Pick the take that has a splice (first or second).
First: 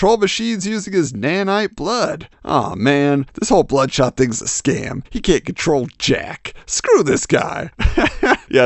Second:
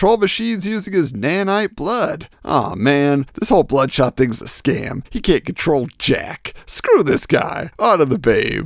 first